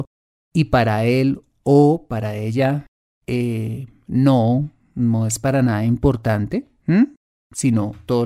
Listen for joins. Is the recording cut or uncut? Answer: uncut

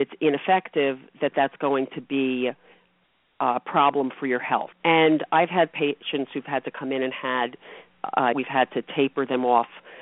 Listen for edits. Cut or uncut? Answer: cut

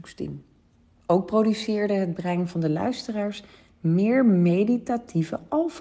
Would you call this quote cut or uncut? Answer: cut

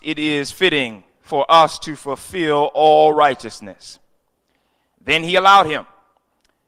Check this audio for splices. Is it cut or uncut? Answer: uncut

